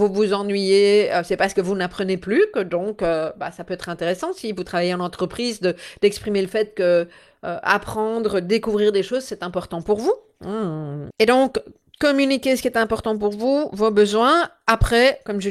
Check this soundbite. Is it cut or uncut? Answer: cut